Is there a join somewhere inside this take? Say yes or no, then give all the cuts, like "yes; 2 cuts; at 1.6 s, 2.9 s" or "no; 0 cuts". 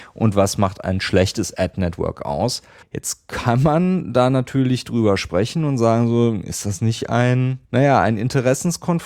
yes; 2 cuts; at 2.8 s, 7.6 s